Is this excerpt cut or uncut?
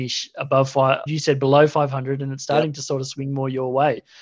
cut